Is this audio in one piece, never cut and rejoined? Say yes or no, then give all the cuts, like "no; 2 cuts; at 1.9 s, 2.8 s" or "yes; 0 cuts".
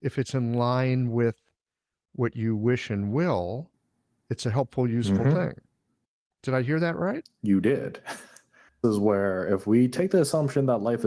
yes; 0 cuts